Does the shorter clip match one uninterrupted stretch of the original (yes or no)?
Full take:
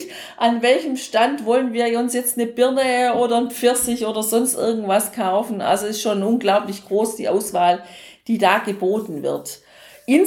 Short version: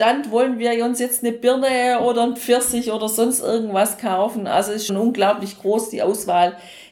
no